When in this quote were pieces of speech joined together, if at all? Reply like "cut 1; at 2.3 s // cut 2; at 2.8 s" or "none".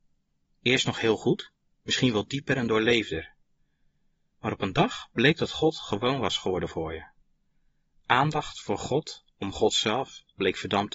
none